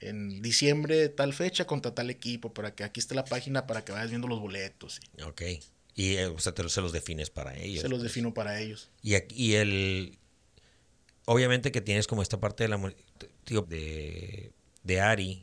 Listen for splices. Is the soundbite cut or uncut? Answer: cut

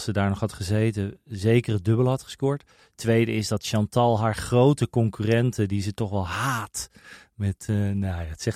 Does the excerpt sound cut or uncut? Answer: uncut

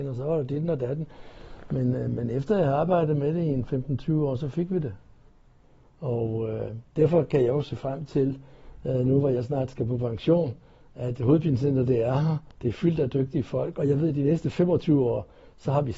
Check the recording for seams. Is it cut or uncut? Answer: uncut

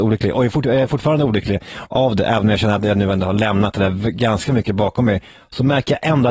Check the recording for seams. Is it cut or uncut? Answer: uncut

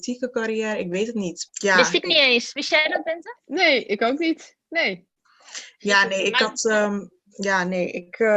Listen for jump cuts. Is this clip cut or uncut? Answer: cut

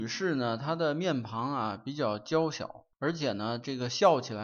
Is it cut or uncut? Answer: cut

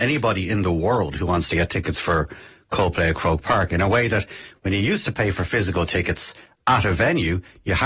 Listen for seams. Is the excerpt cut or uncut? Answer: uncut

